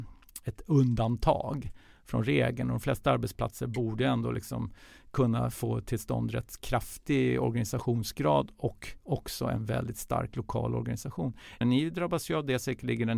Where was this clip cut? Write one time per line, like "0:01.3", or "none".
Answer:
0:09.0
0:11.6